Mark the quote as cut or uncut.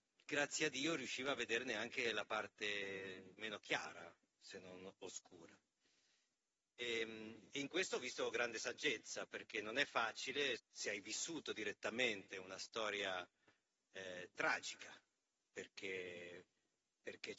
cut